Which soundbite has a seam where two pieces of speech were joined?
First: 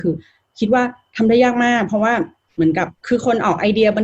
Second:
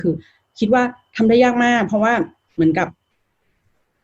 first; 1 cut; at 3.0 s

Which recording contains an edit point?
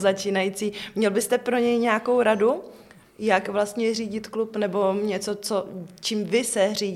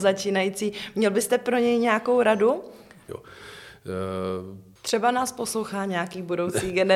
second; 2 cuts; at 3.1 s, 4.8 s

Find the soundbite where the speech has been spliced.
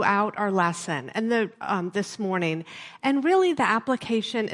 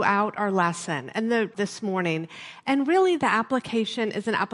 second; 1 cut; at 1.5 s

